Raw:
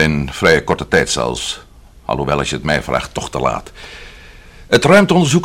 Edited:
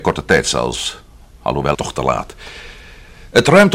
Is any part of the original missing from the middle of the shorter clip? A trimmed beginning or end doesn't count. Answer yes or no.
yes